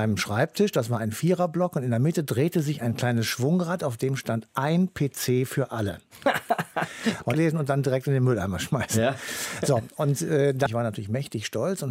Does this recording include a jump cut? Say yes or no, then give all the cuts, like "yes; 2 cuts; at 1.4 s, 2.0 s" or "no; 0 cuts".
yes; 2 cuts; at 7.3 s, 10.7 s